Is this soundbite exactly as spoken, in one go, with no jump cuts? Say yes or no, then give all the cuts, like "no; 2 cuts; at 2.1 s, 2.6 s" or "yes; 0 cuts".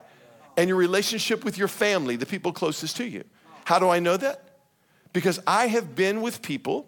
yes; 0 cuts